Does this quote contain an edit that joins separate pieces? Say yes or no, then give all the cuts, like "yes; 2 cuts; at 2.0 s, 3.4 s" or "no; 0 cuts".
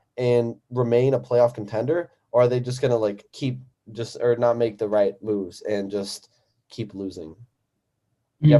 yes; 1 cut; at 3.3 s